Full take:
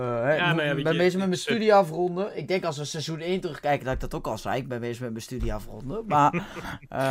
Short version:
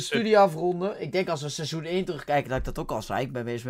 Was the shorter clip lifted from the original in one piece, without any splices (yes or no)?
yes